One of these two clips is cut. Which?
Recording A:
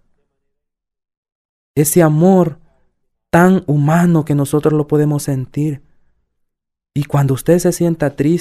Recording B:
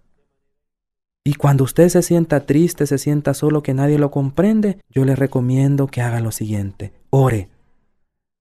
B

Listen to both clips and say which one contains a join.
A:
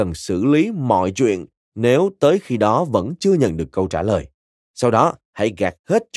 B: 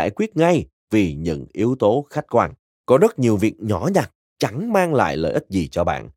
B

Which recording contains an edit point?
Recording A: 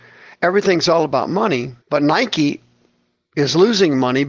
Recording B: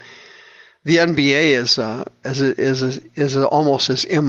A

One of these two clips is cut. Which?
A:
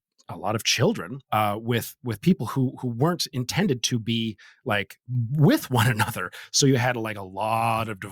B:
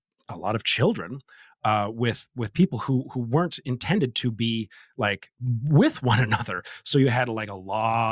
A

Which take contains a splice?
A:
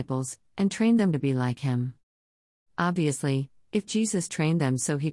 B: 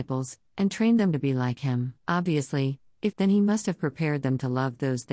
B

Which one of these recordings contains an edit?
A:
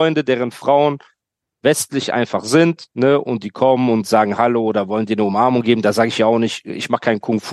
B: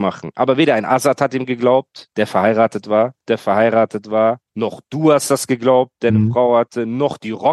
B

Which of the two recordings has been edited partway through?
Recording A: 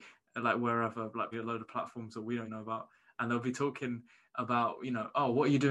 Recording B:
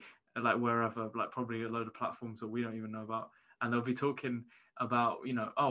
A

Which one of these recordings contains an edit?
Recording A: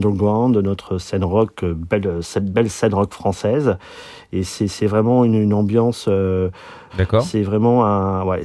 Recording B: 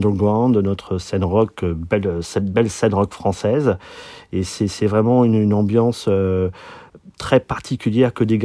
A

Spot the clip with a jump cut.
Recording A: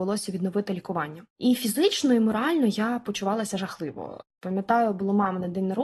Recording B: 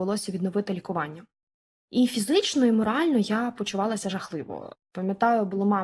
A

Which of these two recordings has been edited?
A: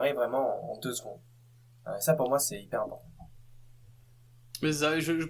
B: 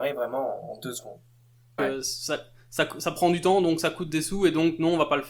B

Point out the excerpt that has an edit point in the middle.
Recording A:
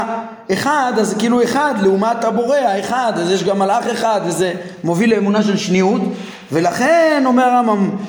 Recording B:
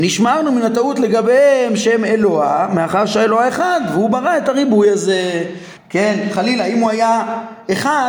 B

